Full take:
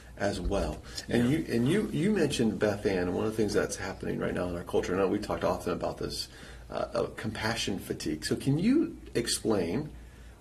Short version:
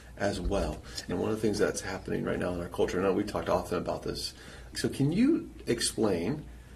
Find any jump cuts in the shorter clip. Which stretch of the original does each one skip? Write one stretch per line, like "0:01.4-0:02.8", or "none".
0:01.1-0:03.1
0:06.7-0:08.2